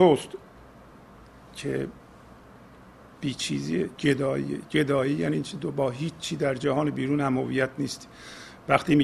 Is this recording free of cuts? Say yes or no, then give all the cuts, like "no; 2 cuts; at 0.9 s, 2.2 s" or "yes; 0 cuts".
yes; 0 cuts